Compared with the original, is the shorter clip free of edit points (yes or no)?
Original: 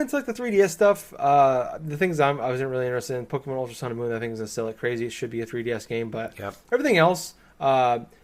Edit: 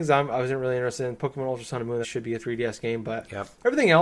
no